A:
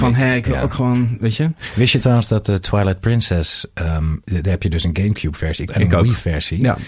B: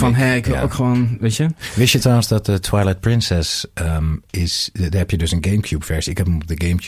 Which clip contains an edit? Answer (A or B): A